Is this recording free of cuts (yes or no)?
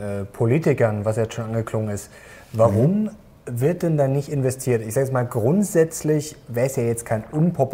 yes